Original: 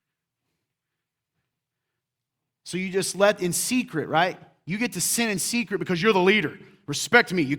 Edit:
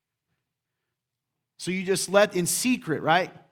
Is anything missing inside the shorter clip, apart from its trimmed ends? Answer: no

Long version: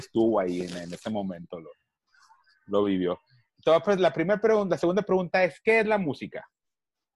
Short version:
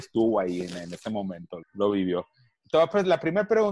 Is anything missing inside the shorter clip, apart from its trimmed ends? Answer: yes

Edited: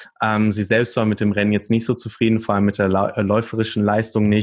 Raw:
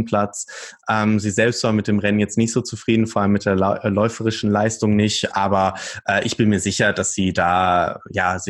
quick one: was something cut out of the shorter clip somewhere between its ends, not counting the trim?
no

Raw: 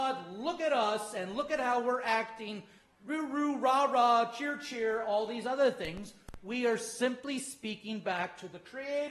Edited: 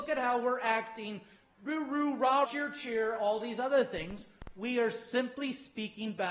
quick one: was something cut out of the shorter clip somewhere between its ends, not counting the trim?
yes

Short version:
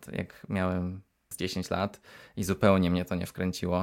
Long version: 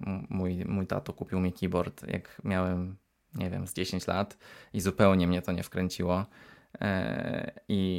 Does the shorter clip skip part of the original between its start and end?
yes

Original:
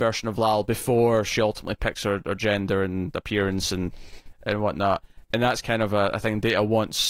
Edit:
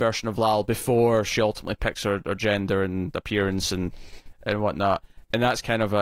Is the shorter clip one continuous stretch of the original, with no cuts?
yes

